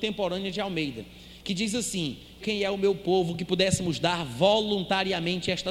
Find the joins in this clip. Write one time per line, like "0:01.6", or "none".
0:02.4

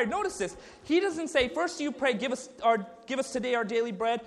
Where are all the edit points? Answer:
none

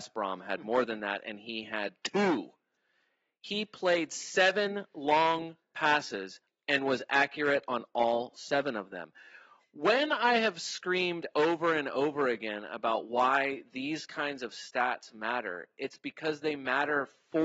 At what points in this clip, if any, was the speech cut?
none

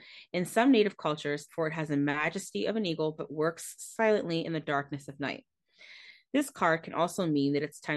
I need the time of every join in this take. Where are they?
0:01.5

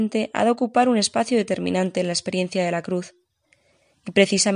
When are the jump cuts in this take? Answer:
none

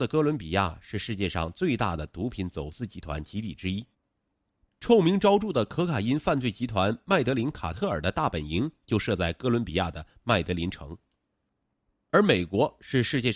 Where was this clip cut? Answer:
none

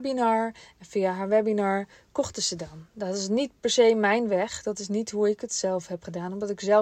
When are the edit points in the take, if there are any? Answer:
none

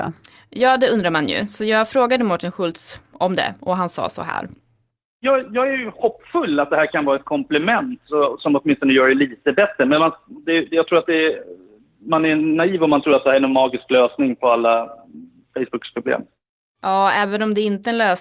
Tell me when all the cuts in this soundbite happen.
none

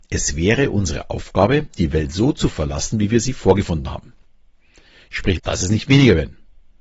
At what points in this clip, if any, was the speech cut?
0:05.4

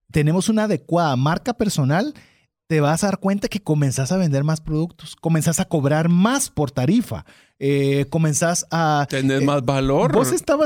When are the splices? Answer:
none

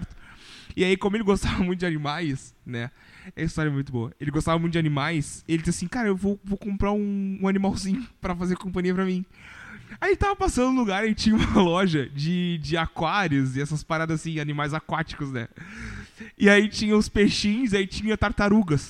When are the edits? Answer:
none

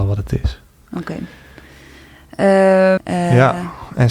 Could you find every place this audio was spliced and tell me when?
0:03.0

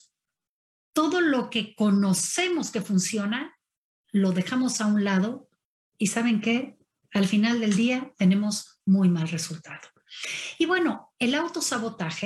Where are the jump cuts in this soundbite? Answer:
none

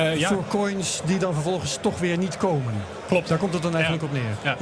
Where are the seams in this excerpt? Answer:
none

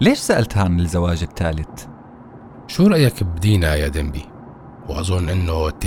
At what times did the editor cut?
0:02.6
0:04.8

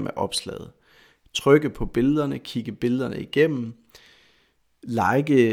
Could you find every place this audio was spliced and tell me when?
none

